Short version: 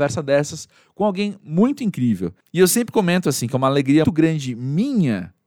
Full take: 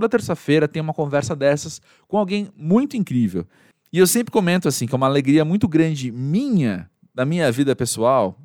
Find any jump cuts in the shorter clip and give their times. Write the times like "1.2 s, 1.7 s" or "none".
2.4 s, 4.0 s

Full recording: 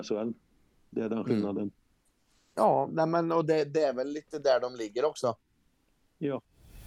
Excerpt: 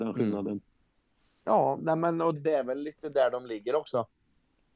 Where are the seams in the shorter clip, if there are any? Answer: 2.4 s

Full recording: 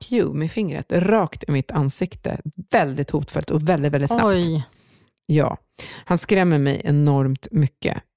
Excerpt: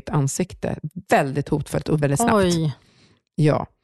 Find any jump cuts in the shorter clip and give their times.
2.0 s

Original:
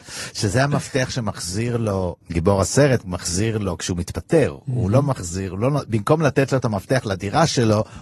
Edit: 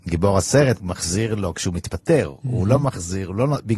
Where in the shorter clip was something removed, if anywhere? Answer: none

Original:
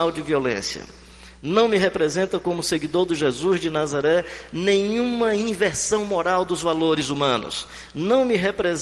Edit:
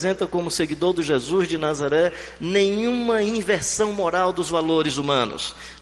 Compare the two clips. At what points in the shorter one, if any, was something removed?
none

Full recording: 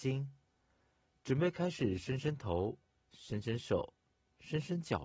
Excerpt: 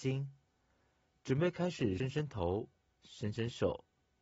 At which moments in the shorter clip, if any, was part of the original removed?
2.0 s

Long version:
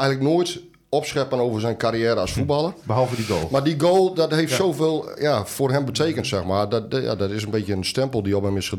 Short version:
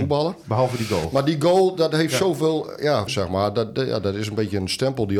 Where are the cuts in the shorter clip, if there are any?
3.1 s

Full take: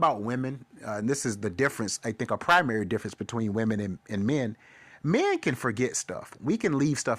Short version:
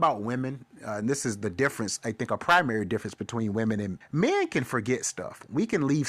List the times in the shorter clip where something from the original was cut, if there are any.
4.0 s

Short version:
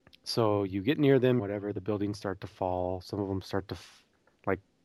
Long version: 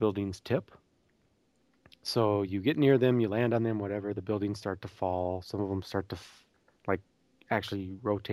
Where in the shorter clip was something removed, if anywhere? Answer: 1.4 s

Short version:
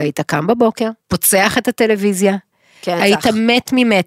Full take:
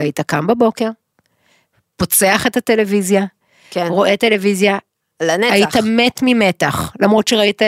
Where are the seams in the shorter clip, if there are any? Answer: 1.0 s, 3.0 s

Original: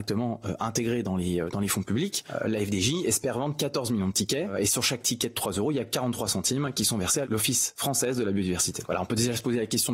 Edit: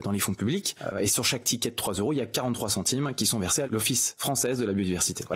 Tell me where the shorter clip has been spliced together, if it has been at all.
0.9 s

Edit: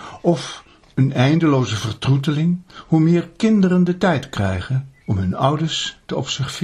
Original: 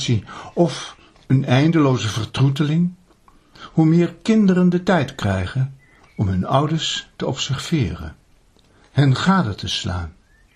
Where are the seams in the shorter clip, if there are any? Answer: 2.7 s, 5.0 s

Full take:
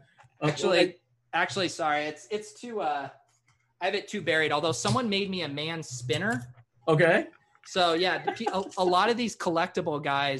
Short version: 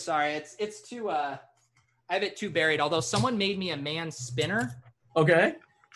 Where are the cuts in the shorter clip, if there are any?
none

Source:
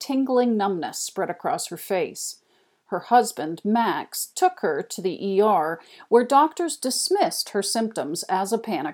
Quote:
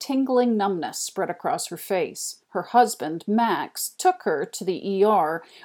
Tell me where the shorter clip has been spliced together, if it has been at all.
2.4 s

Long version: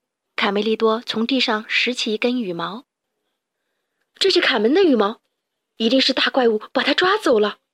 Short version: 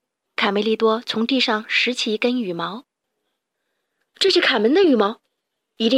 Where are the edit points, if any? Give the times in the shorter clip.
none

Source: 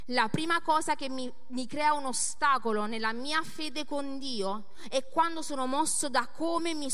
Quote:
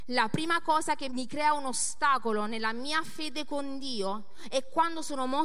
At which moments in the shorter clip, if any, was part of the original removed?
1.1 s

